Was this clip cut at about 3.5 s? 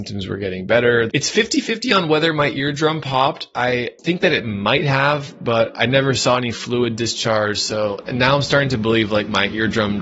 no; 1 cut; at 1.1 s

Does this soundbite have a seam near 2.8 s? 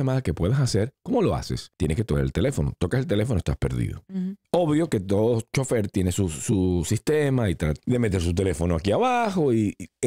no; 1 cut; at 7.8 s

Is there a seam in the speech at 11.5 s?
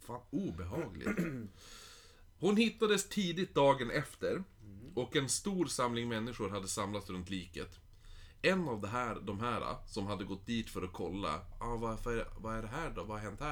yes; 1 cut; at 11.5 s

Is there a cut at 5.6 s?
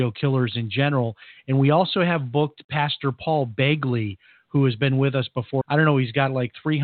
yes; 1 cut; at 5.6 s

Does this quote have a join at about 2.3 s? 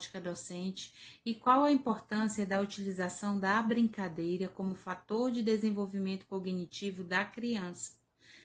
no; 0 cuts

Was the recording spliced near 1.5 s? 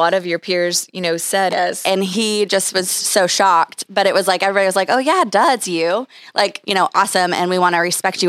yes; 2 cuts; at 1.5 s, 6.6 s

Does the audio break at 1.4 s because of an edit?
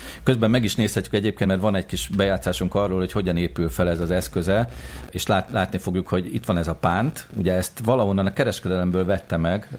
no; 0 cuts

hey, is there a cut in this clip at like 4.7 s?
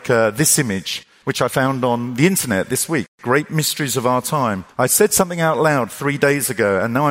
no; 0 cuts

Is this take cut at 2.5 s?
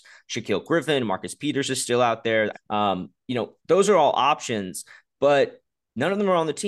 yes; 1 cut; at 2.5 s

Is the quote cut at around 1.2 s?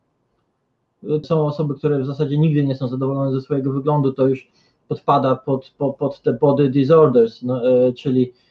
yes; 1 cut; at 1.2 s

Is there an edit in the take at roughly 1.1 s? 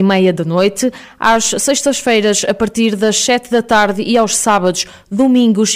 no; 0 cuts

